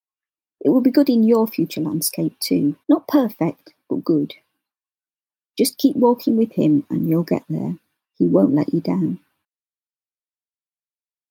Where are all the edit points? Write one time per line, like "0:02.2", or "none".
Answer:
0:02.8